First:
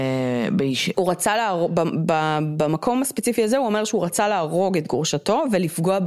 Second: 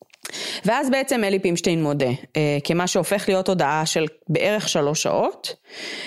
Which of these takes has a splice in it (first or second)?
first